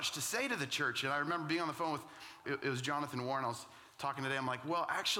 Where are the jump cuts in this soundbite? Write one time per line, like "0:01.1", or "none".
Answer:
0:02.4